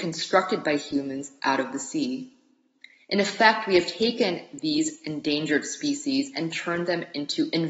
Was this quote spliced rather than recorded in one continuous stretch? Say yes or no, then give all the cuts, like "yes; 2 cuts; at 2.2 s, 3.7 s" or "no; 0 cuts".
no; 0 cuts